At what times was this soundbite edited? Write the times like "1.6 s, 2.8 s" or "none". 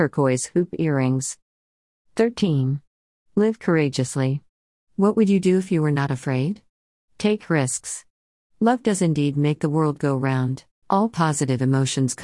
8.5 s, 10.8 s